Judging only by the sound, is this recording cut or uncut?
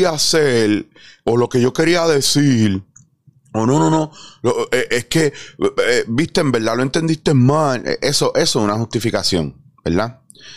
uncut